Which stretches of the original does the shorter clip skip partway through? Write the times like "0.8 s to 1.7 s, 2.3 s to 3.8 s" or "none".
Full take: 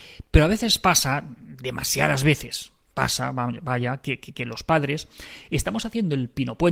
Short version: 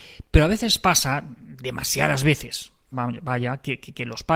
2.9 s to 3.3 s